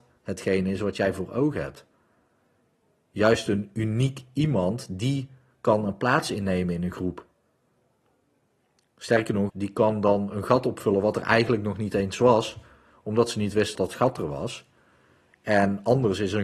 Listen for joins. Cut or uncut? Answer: cut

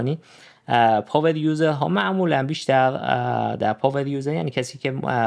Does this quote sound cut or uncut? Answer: uncut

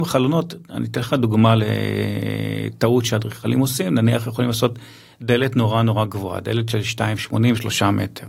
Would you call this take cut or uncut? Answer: uncut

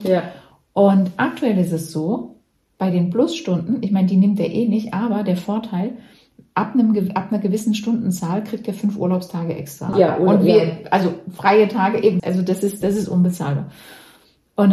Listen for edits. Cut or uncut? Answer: cut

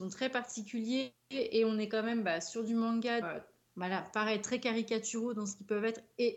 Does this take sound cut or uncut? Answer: cut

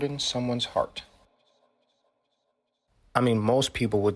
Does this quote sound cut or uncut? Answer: uncut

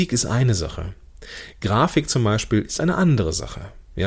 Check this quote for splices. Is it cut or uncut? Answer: uncut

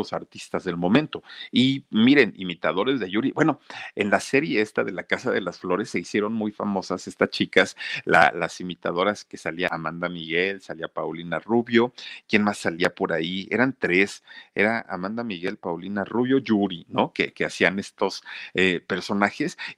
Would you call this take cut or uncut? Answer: uncut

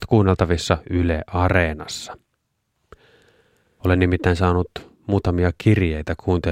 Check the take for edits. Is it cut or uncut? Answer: cut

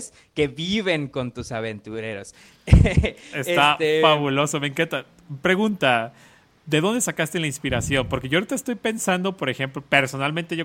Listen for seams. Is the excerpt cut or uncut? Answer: uncut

